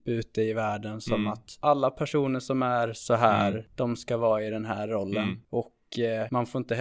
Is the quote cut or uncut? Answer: uncut